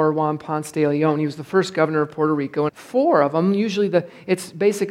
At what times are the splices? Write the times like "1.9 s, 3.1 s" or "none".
2.7 s

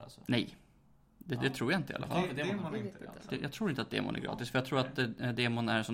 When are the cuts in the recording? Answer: none

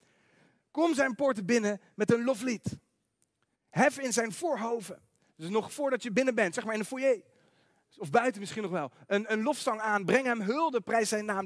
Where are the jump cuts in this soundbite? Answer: none

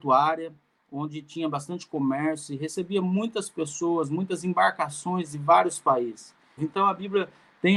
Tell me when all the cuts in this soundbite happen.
6.6 s

